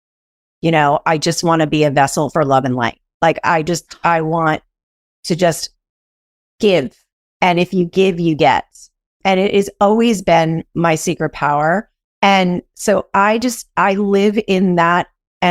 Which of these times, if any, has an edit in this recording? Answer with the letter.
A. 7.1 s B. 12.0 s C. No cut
B